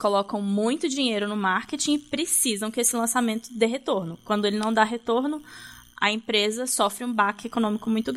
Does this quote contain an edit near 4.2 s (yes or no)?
no